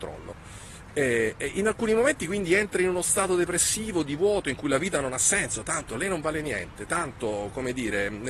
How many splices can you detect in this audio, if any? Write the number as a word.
zero